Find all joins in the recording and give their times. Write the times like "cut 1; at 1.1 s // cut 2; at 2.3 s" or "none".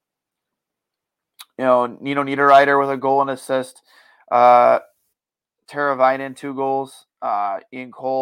none